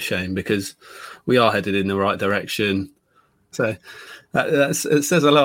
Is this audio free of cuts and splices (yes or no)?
no